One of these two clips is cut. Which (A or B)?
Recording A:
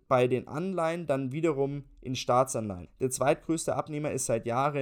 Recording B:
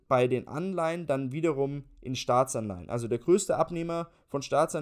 A